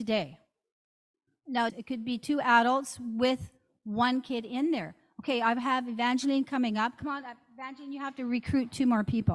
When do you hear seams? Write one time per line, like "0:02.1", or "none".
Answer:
0:01.7
0:07.0